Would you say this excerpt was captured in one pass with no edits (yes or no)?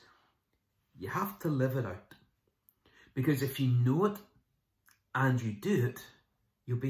yes